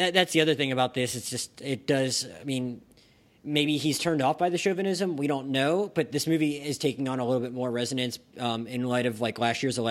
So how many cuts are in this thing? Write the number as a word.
zero